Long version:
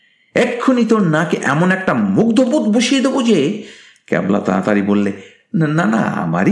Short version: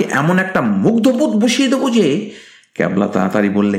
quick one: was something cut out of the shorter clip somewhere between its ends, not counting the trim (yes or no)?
no